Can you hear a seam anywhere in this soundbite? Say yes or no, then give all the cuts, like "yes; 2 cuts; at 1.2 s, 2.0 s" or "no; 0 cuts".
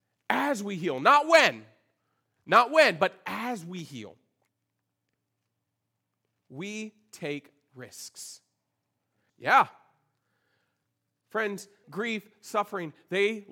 yes; 2 cuts; at 9.3 s, 11.8 s